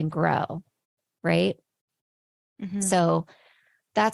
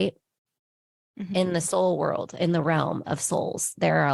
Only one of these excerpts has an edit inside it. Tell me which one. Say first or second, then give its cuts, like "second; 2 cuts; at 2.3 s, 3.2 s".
second; 1 cut; at 1.3 s